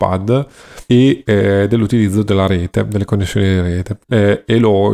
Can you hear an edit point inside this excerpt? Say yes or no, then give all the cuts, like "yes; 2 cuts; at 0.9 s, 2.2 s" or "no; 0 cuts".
yes; 1 cut; at 4.0 s